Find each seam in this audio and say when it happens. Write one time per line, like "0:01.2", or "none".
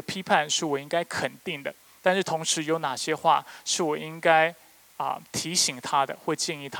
none